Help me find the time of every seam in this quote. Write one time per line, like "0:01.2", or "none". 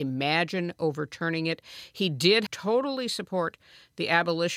0:02.5